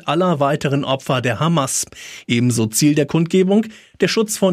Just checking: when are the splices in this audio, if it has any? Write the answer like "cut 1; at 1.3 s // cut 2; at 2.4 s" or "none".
cut 1; at 2.2 s

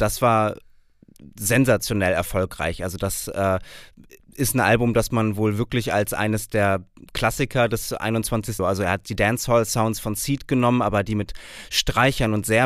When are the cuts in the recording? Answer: cut 1; at 8.6 s

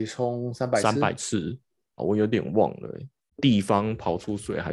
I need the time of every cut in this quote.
cut 1; at 2.0 s // cut 2; at 3.3 s

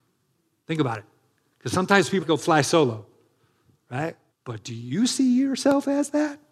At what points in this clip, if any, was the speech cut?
cut 1; at 2.2 s // cut 2; at 4.3 s

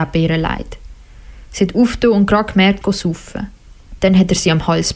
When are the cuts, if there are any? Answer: cut 1; at 2.8 s // cut 2; at 4.0 s

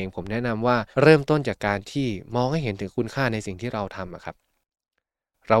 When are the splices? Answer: cut 1; at 0.9 s

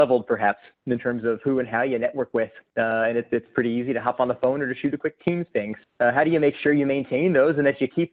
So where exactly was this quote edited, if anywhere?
cut 1; at 5.8 s

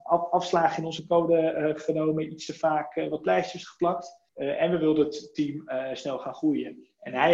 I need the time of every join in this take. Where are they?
cut 1; at 4.3 s

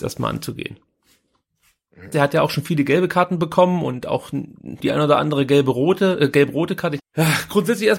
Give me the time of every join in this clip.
cut 1; at 2.1 s // cut 2; at 4.8 s // cut 3; at 7.0 s

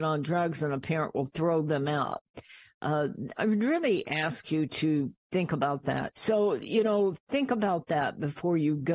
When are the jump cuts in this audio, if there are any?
cut 1; at 3.4 s // cut 2; at 6.1 s

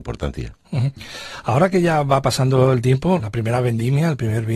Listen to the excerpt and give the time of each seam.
cut 1; at 3.2 s

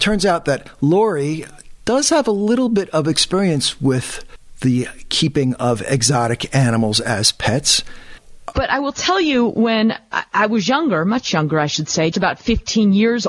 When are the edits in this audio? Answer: cut 1; at 8.5 s // cut 2; at 12.1 s

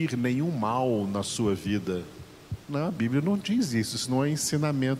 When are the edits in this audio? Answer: cut 1; at 2.6 s

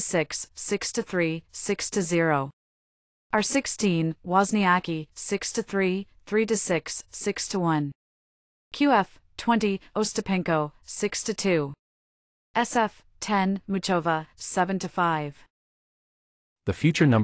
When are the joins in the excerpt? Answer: cut 1; at 10.8 s // cut 2; at 14.3 s

